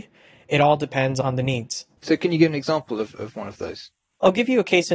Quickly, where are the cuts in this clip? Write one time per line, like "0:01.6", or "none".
none